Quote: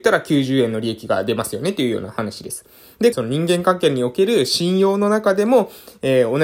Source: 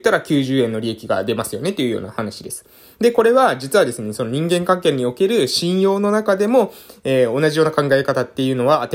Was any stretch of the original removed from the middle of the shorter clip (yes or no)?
yes